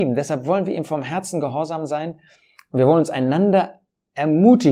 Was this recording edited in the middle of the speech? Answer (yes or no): no